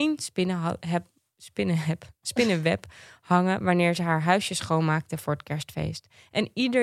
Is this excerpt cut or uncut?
uncut